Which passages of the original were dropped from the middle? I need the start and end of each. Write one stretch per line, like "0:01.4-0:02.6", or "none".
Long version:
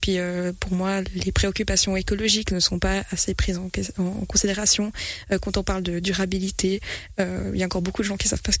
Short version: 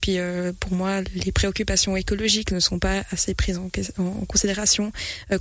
none